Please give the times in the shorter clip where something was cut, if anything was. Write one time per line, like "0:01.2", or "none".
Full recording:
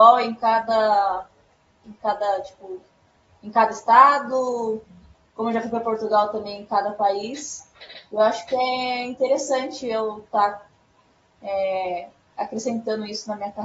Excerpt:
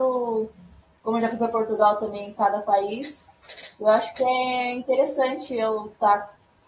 none